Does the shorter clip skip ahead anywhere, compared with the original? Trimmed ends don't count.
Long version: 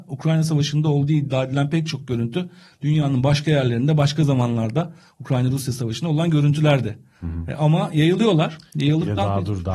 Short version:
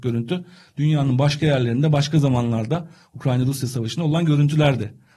no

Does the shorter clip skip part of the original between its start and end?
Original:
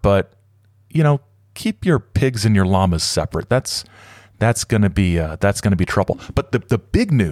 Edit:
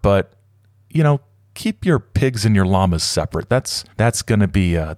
yes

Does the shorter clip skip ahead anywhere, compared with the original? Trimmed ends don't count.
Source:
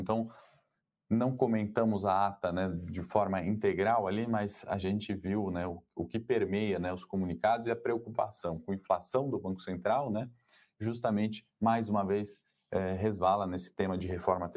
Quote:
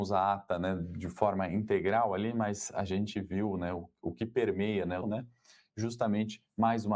yes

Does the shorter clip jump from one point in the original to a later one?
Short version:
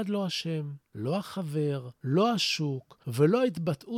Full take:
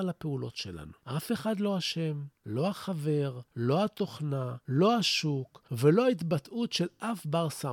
yes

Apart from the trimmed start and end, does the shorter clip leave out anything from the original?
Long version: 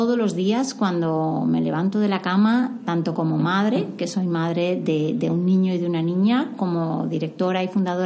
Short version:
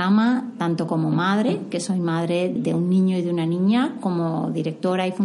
yes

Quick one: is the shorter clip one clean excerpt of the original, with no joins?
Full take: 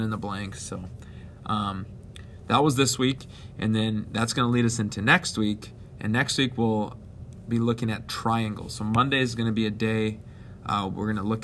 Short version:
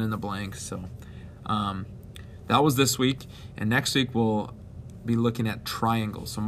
no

